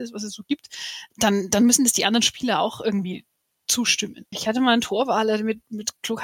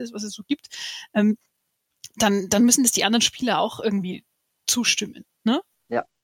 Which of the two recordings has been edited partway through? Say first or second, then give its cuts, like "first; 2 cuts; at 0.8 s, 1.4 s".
first; 2 cuts; at 1.1 s, 4.3 s